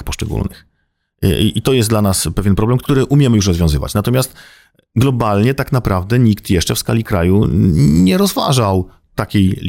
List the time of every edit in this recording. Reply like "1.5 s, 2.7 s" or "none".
2.8 s